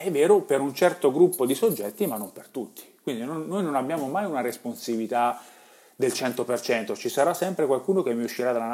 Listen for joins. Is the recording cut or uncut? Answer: uncut